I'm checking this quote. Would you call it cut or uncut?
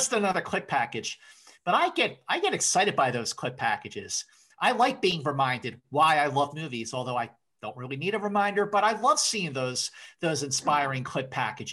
uncut